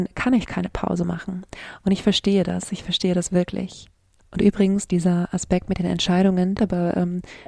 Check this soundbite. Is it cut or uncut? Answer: cut